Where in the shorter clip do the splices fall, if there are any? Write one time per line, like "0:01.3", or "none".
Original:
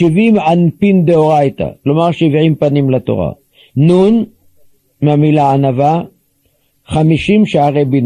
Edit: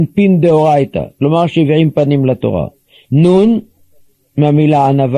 none